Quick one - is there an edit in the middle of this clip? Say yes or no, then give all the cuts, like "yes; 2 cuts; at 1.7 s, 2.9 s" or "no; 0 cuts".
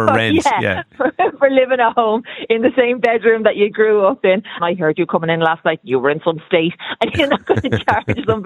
yes; 1 cut; at 4.6 s